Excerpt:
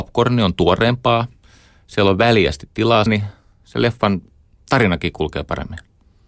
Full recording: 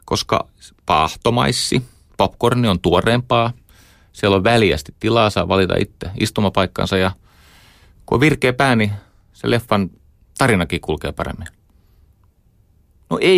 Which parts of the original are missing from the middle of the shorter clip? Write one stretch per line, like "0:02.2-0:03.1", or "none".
0:05.3-0:08.7